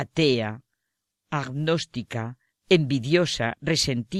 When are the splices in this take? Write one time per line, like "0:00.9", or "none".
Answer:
0:02.5

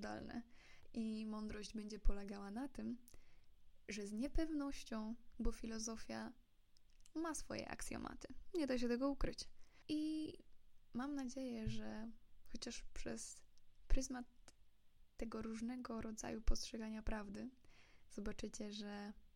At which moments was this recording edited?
0:05.3
0:09.8

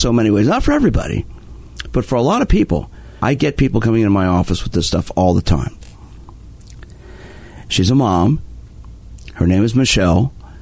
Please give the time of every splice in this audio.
0:03.2
0:07.7

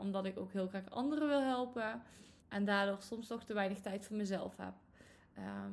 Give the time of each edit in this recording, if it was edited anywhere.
0:02.4

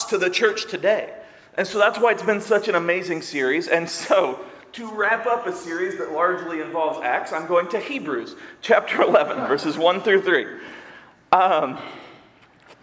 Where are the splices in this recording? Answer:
none

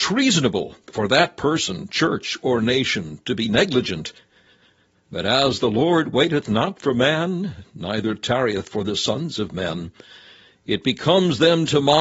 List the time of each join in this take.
none

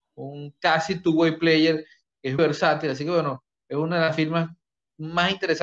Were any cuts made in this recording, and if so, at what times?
0:02.4

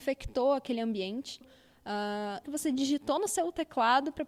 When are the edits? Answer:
0:01.4
0:02.4

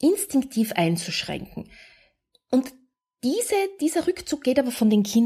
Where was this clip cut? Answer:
0:02.3

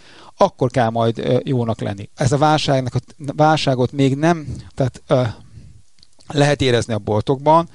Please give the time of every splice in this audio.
0:02.1
0:04.7

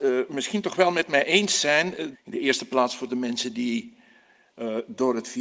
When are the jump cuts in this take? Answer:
0:02.1

